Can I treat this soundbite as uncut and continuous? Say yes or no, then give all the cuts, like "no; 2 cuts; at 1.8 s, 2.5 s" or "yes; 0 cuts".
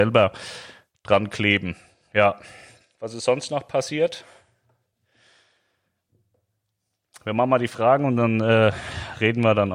yes; 0 cuts